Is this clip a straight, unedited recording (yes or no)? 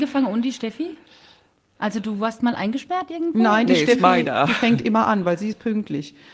yes